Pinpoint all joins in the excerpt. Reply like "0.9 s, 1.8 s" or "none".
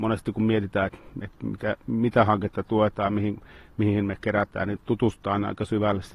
none